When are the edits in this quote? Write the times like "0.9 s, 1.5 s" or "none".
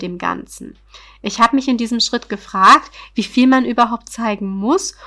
none